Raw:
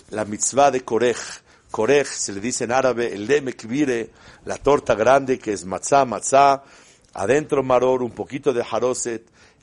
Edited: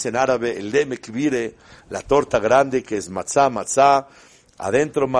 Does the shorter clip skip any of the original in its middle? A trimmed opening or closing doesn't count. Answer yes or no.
no